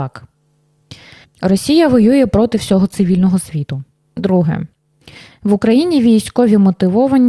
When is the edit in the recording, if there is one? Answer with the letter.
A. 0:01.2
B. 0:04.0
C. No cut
A